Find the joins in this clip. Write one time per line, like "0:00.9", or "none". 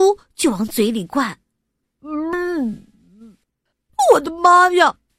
0:01.8